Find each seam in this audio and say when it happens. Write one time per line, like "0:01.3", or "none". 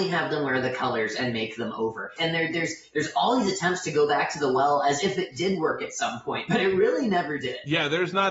0:02.2